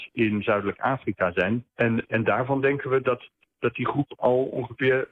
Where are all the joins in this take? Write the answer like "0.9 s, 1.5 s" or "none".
none